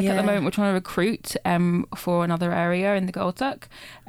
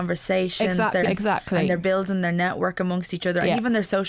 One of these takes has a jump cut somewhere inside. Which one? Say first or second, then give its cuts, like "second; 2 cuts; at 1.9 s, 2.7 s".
second; 1 cut; at 1.1 s